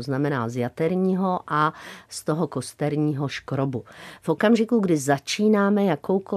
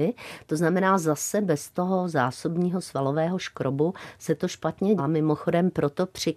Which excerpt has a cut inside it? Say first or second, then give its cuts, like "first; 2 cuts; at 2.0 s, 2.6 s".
second; 1 cut; at 5.0 s